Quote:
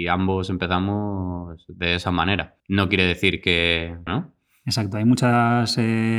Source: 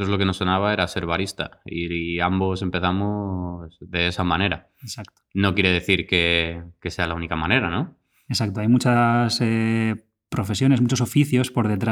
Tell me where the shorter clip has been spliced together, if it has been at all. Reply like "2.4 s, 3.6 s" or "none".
2.6 s, 4.1 s